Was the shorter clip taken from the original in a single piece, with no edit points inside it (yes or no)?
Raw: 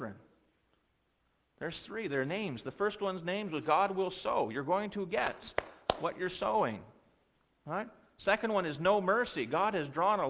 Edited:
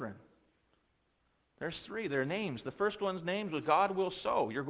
yes